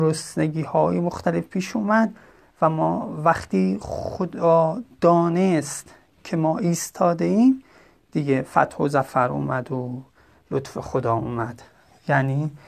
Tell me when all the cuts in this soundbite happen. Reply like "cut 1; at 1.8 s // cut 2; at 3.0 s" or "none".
none